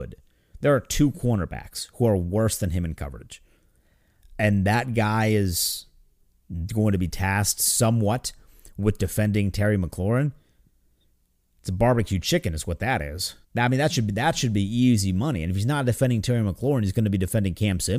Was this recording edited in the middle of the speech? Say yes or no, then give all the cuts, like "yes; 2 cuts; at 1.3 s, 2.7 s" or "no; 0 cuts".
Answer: yes; 1 cut; at 13.4 s